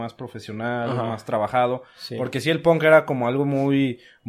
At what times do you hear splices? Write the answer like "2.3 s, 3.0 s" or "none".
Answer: none